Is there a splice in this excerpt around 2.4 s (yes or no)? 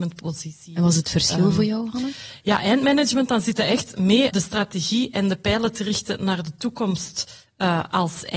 no